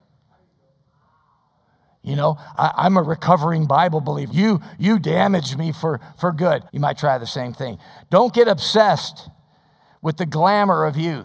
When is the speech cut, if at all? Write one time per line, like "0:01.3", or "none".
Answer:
0:04.3
0:06.7

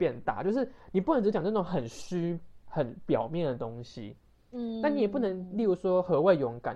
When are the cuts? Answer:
none

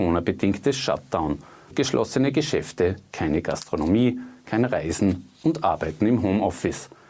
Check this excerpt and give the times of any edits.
0:01.7

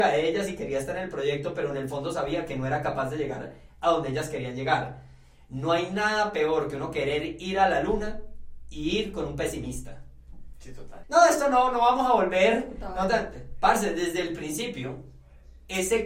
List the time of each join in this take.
0:11.0

